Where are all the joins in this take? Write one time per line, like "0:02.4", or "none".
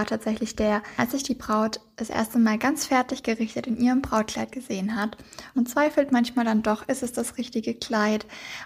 0:01.0
0:05.5